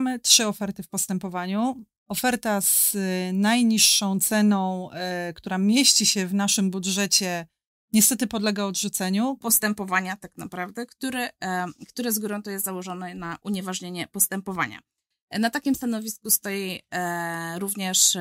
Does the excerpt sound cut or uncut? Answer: cut